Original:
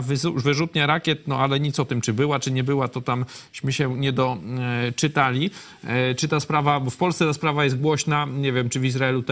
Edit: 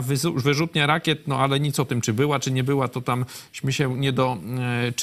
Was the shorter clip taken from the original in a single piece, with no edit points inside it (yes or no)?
yes